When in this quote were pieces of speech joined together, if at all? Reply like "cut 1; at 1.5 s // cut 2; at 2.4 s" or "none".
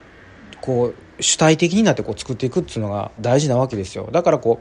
cut 1; at 3.2 s

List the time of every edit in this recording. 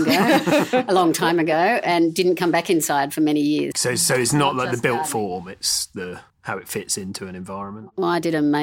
cut 1; at 3.7 s // cut 2; at 6.3 s

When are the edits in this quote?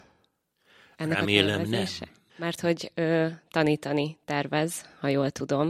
cut 1; at 2.3 s

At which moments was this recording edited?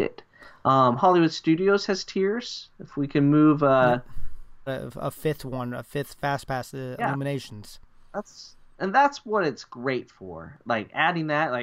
cut 1; at 4.7 s

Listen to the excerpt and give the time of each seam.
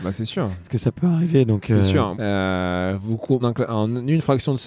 cut 1; at 2.1 s // cut 2; at 3.4 s

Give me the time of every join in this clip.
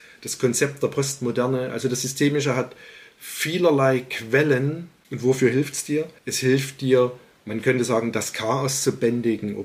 cut 1; at 6.2 s

